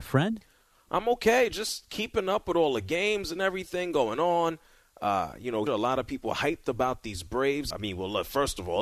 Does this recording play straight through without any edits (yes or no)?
no